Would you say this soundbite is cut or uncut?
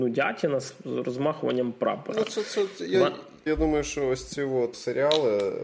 cut